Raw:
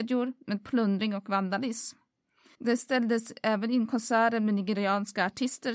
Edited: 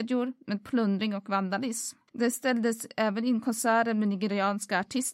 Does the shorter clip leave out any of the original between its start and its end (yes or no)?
yes